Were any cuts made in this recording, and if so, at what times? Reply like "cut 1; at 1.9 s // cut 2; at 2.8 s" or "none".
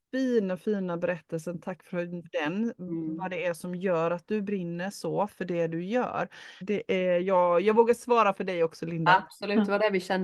cut 1; at 2.2 s // cut 2; at 6.6 s